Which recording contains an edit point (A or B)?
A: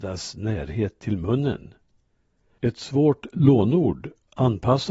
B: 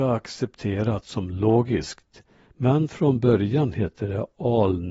A